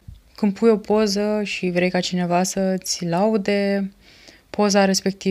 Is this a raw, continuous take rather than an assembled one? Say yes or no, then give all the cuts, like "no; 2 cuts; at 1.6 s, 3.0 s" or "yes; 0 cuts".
yes; 0 cuts